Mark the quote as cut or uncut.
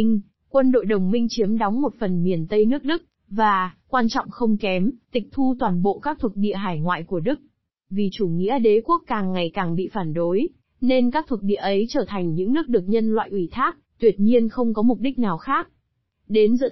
cut